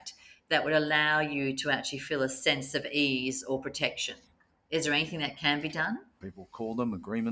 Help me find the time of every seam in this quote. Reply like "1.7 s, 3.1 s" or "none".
6.2 s